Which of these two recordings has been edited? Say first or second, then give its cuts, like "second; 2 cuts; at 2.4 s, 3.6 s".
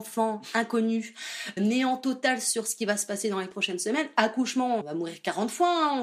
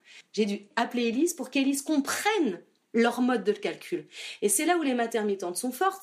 first; 2 cuts; at 1.6 s, 4.8 s